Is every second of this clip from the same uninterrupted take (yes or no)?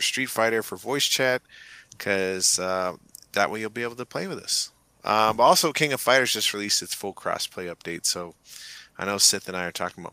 yes